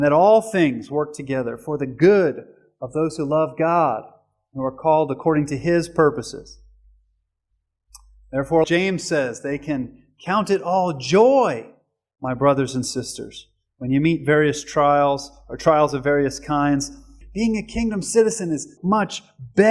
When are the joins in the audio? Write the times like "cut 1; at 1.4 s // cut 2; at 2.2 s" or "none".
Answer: cut 1; at 8.6 s // cut 2; at 17.2 s // cut 3; at 18.8 s